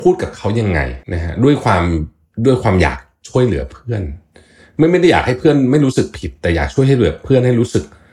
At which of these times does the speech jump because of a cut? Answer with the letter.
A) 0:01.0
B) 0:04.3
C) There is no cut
A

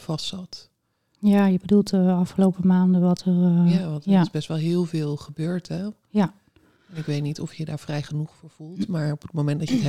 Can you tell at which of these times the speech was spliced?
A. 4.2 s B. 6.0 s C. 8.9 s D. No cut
D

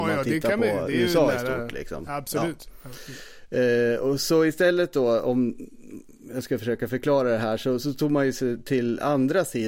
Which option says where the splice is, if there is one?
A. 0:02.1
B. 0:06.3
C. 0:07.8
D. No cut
D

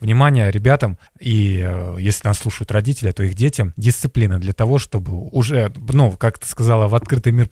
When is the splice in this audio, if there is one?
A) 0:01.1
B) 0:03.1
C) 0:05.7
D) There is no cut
A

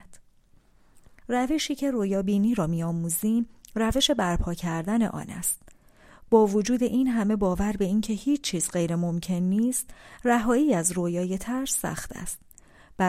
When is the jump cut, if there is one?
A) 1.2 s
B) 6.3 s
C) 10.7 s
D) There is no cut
A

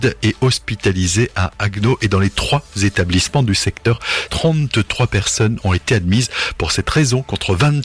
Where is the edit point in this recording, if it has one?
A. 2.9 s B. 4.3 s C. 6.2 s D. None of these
B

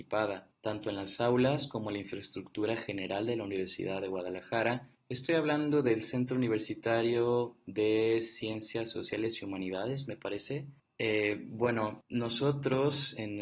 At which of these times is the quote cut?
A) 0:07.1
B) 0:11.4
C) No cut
C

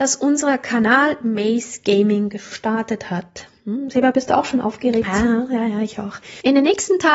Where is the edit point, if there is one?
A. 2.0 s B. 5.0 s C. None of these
B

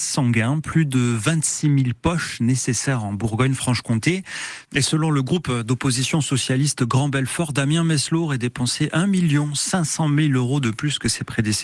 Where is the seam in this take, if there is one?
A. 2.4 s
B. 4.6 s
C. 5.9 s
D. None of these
B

